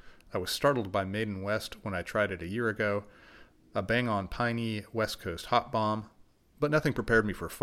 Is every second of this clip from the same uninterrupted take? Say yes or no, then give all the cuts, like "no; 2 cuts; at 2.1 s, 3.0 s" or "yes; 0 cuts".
yes; 0 cuts